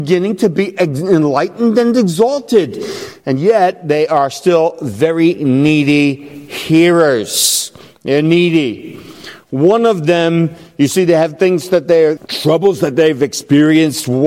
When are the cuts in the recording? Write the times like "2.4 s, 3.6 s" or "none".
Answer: 12.2 s